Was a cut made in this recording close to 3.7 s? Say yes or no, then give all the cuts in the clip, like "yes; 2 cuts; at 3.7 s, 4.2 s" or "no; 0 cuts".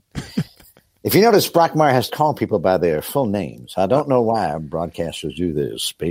no; 1 cut; at 2.1 s